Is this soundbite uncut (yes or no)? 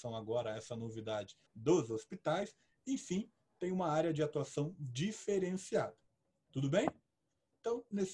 no